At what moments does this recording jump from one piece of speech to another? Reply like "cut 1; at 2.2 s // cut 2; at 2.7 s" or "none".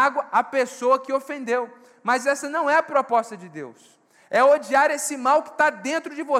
none